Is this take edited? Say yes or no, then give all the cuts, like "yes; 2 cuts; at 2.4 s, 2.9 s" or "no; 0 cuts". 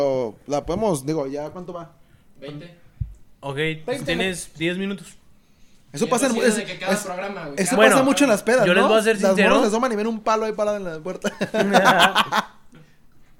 yes; 1 cut; at 5.9 s